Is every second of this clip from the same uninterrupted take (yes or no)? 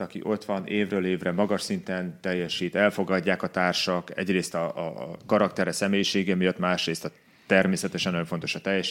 yes